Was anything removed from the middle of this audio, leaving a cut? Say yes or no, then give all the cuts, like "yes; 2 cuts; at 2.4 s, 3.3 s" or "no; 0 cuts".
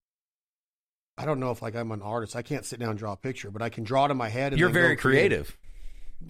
no; 0 cuts